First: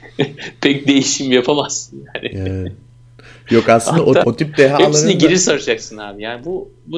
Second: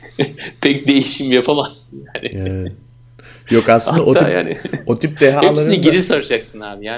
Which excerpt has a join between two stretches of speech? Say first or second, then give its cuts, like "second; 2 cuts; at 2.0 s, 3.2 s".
first; 1 cut; at 4.2 s